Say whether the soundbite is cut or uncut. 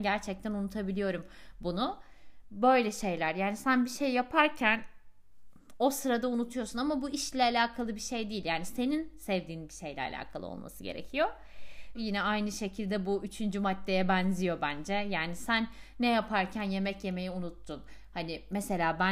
cut